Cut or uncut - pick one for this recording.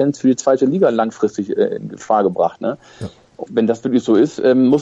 cut